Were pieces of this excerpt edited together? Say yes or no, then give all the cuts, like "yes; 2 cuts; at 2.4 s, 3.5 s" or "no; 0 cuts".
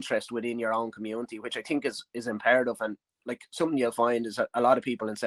no; 0 cuts